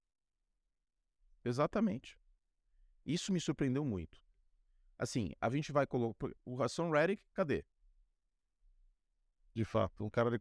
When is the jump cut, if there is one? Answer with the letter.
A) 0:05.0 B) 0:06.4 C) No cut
B